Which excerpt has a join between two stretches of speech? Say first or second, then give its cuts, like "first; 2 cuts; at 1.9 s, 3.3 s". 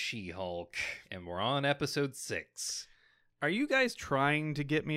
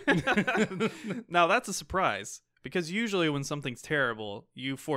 first; 1 cut; at 1.0 s